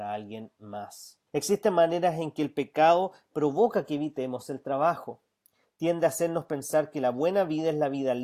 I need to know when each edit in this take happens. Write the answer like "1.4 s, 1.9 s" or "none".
1.3 s